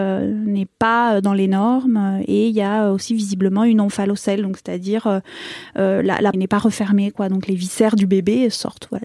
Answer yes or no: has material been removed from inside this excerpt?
yes